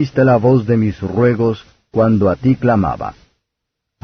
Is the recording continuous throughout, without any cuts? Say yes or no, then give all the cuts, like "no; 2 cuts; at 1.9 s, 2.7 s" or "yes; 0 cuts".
yes; 0 cuts